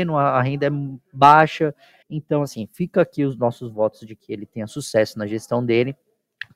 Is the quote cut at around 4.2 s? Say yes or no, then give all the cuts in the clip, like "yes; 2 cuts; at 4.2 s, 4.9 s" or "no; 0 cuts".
no; 1 cut; at 2.0 s